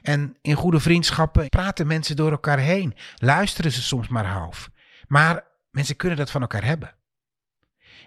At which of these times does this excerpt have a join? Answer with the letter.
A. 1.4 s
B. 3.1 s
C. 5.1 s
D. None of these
A